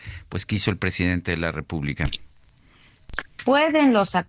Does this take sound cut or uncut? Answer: cut